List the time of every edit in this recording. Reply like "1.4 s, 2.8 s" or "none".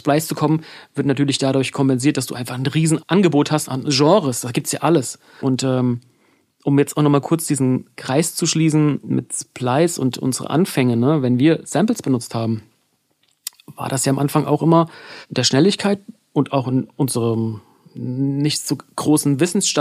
none